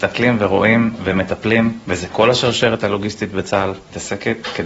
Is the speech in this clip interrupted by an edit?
no; 0 cuts

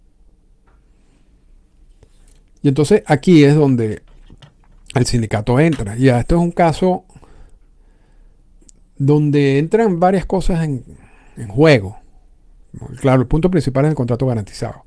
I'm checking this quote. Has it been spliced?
no; 0 cuts

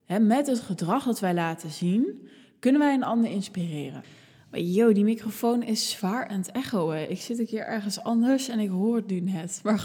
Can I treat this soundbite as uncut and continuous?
yes; 0 cuts

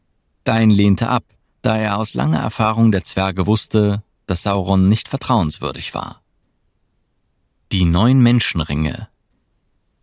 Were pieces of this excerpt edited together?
no; 0 cuts

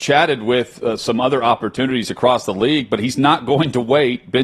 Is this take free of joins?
yes; 0 cuts

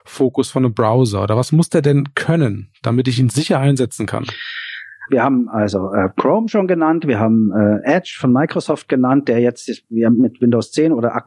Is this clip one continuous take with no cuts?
no; 1 cut; at 5.1 s

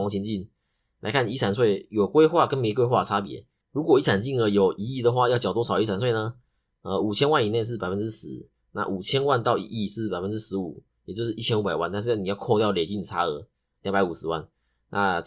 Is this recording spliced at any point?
yes; 1 cut; at 3.6 s

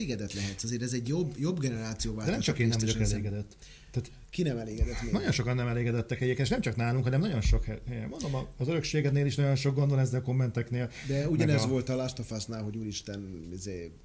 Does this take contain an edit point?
no; 0 cuts

